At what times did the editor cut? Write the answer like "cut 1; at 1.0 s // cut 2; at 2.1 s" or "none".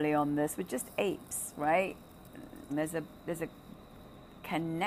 cut 1; at 2.7 s